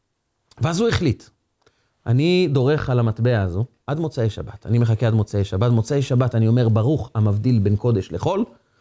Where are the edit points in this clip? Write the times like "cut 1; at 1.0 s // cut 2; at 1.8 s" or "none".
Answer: none